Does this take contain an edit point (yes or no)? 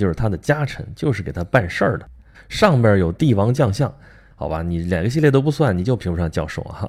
yes